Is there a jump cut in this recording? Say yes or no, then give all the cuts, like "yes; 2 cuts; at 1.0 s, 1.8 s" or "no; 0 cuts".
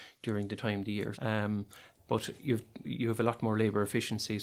yes; 2 cuts; at 1.1 s, 2.8 s